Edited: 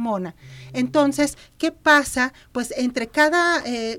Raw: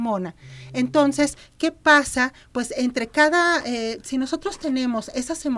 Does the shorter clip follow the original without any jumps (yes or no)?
yes